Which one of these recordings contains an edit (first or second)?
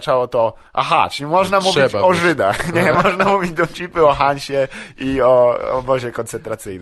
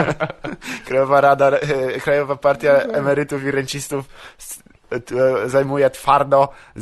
first